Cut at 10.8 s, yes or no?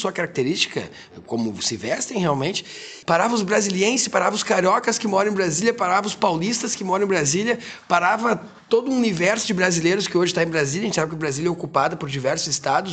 no